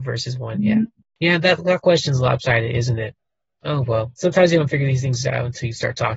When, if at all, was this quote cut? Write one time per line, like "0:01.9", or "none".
none

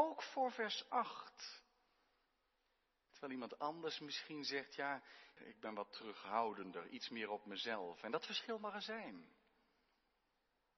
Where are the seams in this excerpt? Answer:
0:03.1
0:05.4

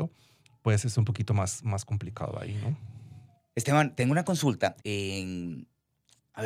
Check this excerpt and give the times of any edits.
0:04.8

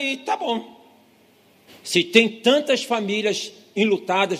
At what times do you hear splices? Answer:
0:01.7

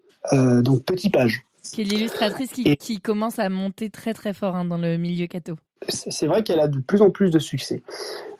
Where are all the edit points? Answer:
none

